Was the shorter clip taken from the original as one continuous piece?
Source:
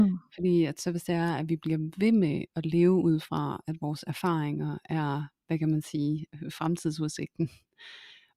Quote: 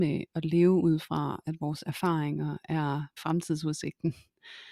no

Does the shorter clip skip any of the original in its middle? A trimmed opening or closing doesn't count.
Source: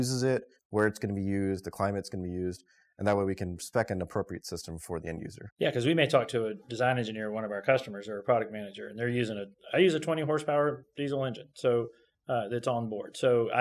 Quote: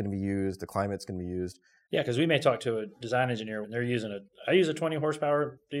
yes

